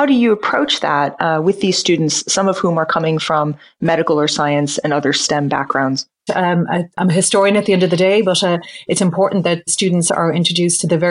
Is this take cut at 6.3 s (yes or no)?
yes